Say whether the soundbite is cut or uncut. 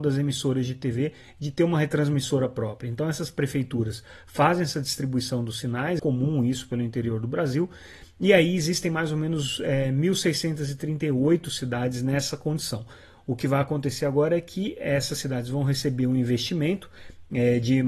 cut